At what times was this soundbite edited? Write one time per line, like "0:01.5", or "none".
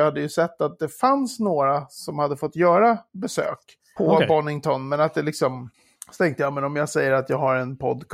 0:04.0